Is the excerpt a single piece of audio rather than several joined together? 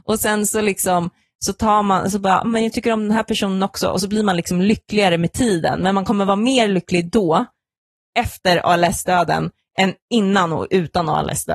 yes; 0 cuts

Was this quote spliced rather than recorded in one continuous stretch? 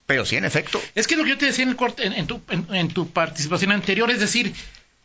no; 0 cuts

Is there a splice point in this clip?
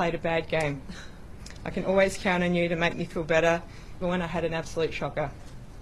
yes; 1 cut; at 4.0 s

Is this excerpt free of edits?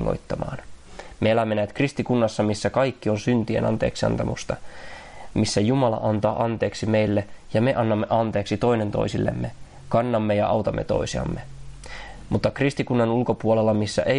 yes; 0 cuts

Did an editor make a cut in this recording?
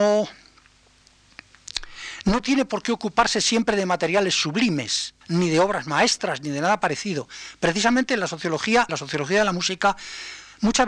yes; 2 cuts; at 5.2 s, 8.9 s

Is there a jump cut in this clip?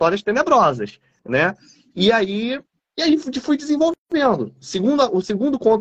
no; 0 cuts

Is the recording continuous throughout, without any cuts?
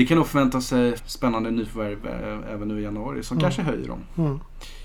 no; 1 cut; at 1.0 s

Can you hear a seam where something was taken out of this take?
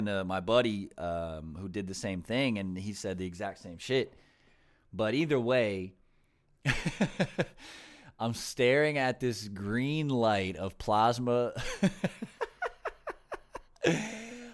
no; 0 cuts

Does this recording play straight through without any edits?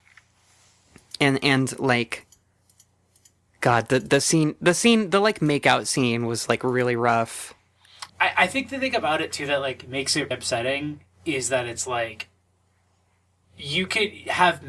no; 2 cuts; at 8.1 s, 10.3 s

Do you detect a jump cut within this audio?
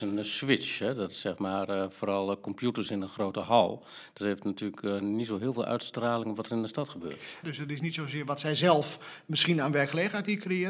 yes; 1 cut; at 7.4 s

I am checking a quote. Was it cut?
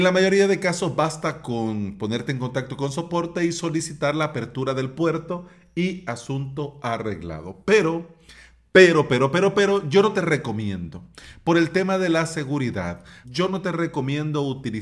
yes; 1 cut; at 13.2 s

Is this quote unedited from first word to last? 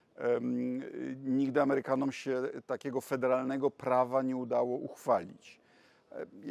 yes; 0 cuts

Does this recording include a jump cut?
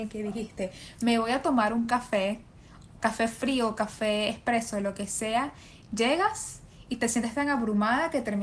no; 0 cuts

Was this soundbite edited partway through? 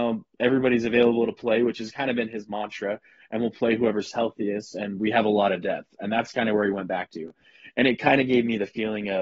no; 0 cuts

